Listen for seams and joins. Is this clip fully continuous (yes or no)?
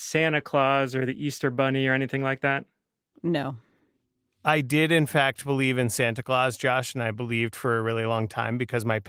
yes